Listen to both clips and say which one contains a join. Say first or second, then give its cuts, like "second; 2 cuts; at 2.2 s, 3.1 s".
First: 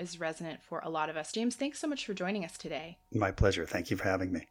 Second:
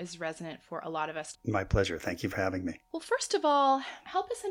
second; 1 cut; at 1.3 s